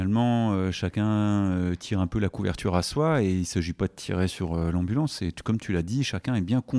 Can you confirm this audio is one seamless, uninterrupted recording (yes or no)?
yes